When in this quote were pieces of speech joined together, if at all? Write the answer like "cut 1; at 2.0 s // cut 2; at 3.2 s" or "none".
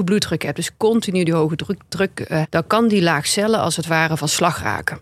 cut 1; at 2.4 s